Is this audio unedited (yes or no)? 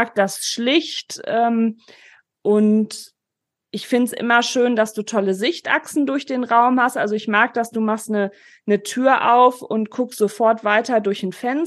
yes